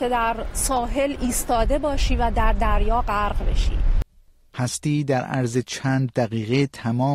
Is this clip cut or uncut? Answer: uncut